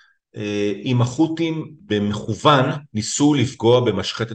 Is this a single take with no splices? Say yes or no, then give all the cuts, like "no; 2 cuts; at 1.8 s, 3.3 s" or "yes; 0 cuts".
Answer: yes; 0 cuts